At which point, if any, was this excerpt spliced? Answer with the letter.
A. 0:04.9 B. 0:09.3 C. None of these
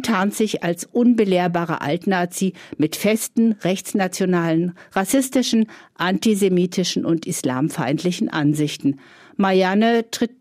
C